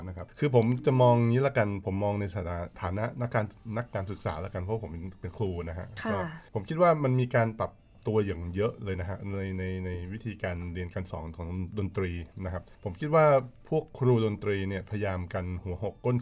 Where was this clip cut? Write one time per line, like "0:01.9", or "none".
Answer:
0:06.5